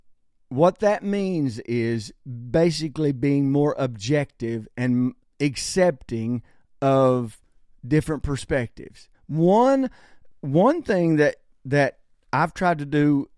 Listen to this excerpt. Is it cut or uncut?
cut